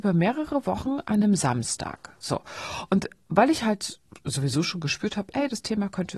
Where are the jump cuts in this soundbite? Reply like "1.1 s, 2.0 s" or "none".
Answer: none